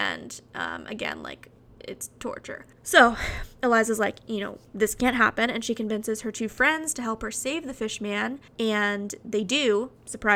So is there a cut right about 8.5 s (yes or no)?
yes